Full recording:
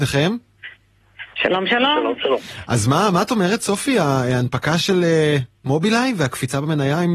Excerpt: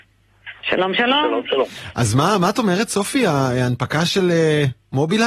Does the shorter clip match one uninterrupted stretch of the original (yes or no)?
yes